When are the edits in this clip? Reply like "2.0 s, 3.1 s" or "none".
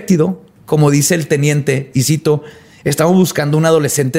none